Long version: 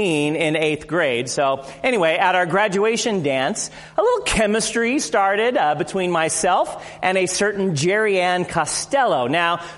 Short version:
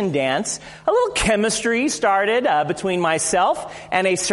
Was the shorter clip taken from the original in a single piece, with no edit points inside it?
yes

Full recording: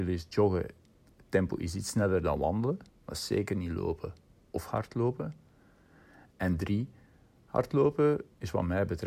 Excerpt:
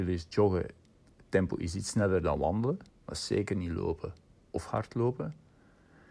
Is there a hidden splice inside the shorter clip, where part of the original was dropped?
no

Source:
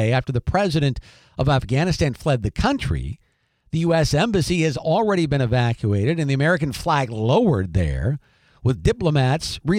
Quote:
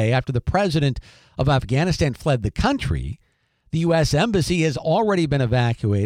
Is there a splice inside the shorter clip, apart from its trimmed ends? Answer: no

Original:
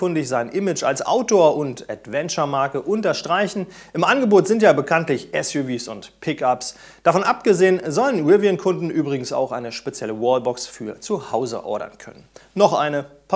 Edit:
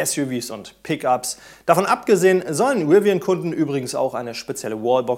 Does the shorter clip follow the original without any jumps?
yes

